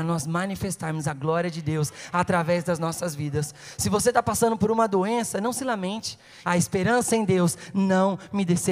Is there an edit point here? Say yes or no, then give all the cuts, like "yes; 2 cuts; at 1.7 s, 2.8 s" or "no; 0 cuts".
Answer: yes; 1 cut; at 6.4 s